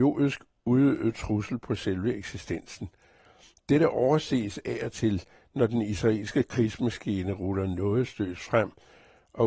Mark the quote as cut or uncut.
uncut